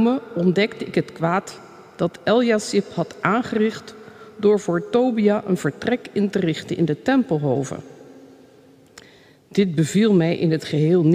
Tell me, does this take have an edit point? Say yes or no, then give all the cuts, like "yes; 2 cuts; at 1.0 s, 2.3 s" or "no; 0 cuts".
no; 0 cuts